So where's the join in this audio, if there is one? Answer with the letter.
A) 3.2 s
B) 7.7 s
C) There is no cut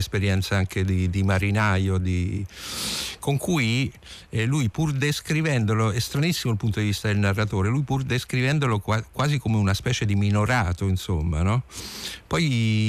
C